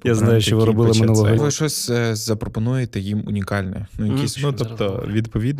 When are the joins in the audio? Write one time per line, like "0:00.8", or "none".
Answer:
0:01.4
0:04.4